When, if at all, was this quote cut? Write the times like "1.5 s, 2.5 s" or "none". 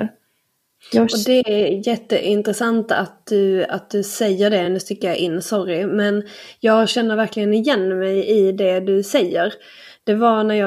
none